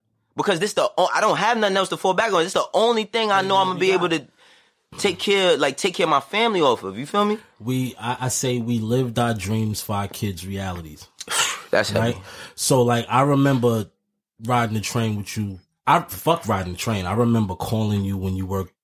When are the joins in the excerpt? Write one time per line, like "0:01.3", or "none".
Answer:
none